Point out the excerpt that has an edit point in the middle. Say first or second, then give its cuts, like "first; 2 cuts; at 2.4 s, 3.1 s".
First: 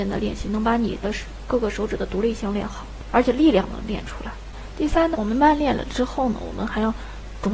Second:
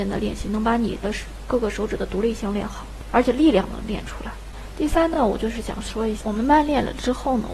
first; 1 cut; at 5.1 s